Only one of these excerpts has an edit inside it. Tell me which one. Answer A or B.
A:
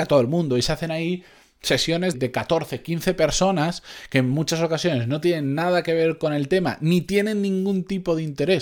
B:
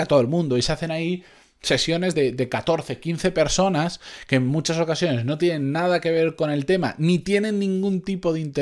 A